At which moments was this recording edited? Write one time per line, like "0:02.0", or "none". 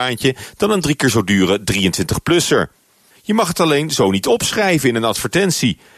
0:03.1